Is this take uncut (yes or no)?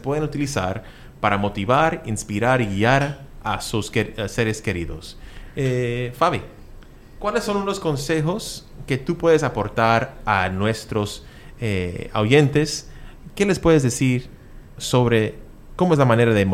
yes